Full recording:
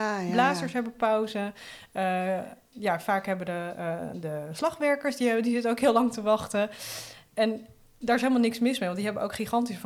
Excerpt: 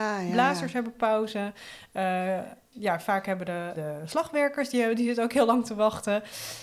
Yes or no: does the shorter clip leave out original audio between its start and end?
yes